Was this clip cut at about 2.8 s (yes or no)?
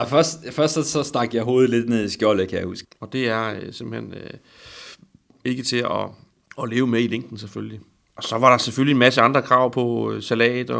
yes